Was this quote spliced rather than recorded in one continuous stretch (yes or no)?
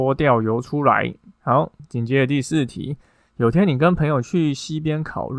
yes